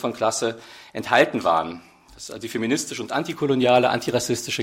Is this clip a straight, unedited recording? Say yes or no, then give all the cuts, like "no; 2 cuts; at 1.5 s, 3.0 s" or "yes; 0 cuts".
yes; 0 cuts